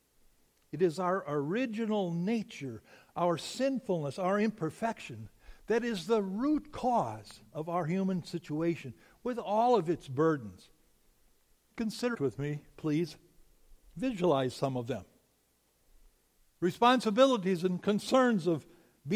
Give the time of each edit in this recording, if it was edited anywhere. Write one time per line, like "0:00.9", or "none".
0:12.1
0:16.4